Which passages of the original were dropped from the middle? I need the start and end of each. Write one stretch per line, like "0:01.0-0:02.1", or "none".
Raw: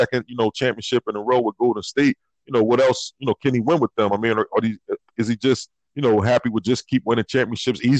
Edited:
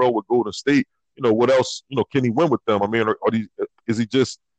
none